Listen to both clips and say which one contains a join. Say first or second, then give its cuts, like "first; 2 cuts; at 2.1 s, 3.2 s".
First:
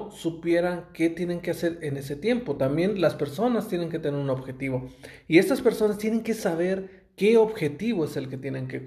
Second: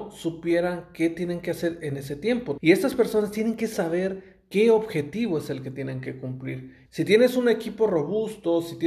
second; 2 cuts; at 2.6 s, 6.9 s